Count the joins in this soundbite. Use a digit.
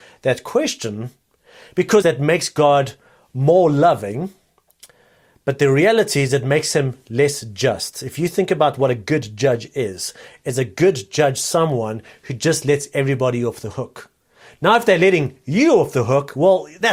1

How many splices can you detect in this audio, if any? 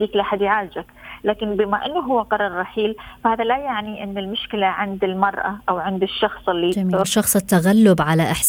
1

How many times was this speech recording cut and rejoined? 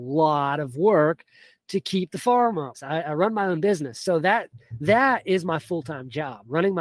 1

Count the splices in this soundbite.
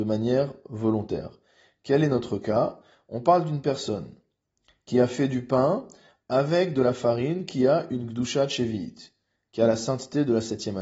0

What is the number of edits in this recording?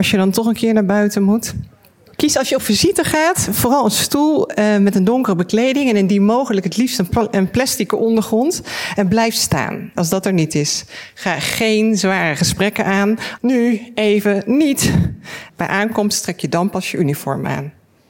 2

